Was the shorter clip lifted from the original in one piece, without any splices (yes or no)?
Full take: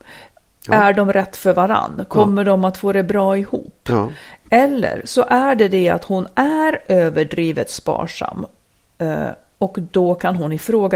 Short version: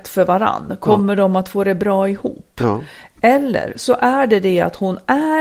yes